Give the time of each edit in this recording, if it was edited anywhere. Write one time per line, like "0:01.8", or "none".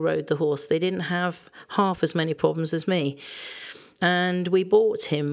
0:04.0